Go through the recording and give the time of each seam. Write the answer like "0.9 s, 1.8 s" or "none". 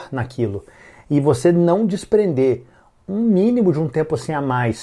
none